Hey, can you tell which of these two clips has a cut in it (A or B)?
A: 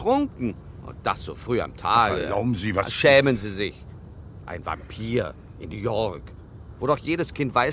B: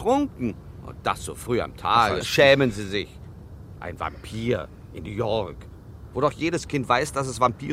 B